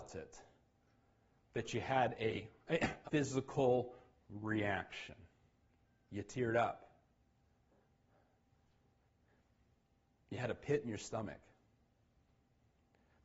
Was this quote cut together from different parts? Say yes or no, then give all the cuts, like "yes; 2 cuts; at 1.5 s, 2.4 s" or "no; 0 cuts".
yes; 1 cut; at 3.1 s